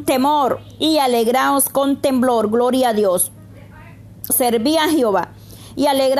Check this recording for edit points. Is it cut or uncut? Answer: cut